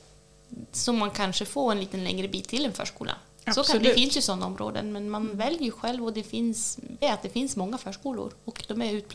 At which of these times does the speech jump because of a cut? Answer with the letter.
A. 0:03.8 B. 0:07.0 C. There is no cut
B